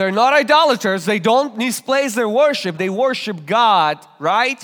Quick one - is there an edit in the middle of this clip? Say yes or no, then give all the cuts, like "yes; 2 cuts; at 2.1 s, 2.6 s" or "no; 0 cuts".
yes; 1 cut; at 2.8 s